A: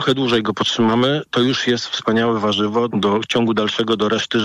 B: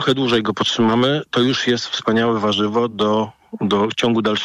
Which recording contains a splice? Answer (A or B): A